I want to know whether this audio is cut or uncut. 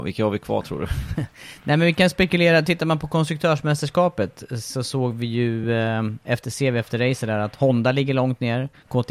uncut